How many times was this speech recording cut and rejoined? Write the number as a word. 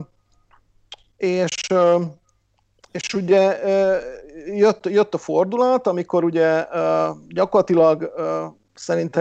zero